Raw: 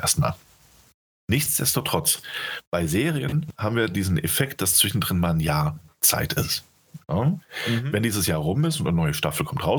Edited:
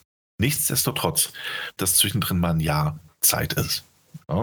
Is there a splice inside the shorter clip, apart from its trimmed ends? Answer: yes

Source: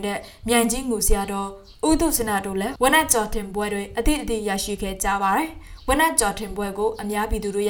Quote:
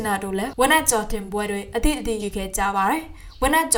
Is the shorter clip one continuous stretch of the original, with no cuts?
no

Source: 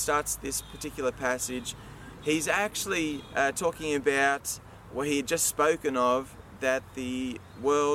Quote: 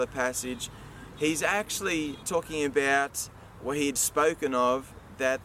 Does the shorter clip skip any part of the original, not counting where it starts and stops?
yes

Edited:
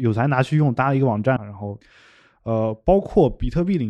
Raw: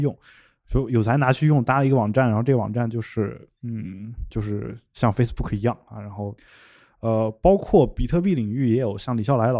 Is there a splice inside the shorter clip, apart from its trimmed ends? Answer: yes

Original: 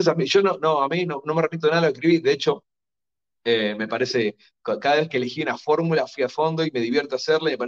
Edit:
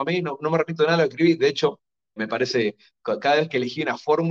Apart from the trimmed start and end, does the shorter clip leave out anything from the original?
yes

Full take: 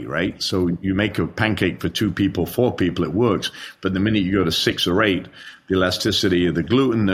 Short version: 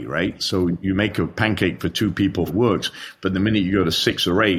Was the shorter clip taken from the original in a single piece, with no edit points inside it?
no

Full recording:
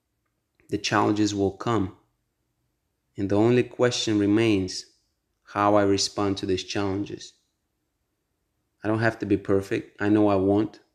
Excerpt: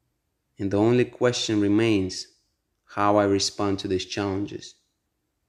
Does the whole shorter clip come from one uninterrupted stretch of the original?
yes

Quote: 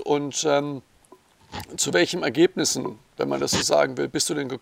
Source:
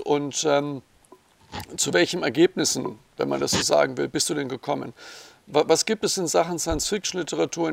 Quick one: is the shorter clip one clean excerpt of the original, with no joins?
yes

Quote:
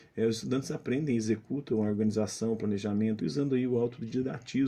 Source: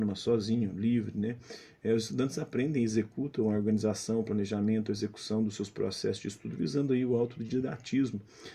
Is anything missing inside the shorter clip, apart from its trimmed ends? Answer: yes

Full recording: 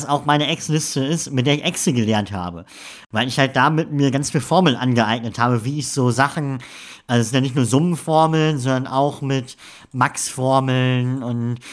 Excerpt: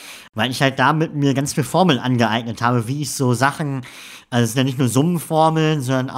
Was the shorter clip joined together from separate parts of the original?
no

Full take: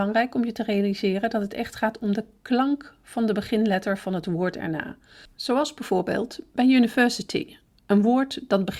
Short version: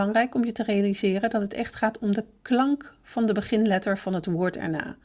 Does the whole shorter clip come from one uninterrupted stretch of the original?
yes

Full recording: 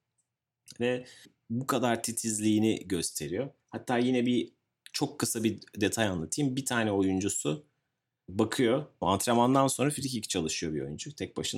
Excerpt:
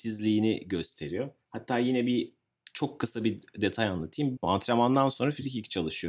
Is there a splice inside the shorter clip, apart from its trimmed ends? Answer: yes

